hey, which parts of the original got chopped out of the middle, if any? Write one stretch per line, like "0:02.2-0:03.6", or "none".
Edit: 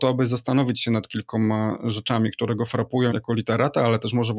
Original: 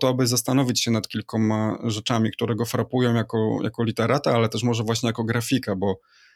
0:03.1-0:03.6